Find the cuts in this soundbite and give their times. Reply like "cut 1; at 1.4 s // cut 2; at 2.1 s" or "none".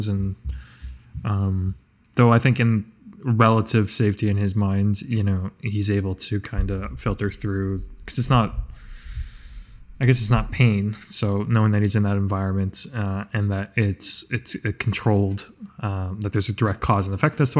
none